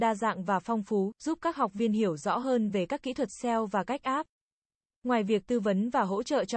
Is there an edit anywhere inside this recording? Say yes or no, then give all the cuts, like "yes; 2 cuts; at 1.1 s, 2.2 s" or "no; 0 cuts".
no; 0 cuts